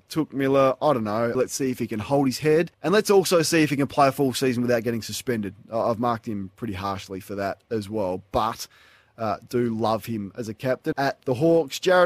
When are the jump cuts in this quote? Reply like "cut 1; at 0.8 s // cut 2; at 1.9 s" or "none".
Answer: cut 1; at 1.3 s // cut 2; at 2.7 s // cut 3; at 10.9 s